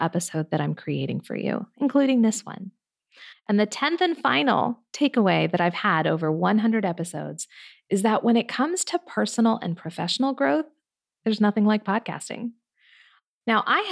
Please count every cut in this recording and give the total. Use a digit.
1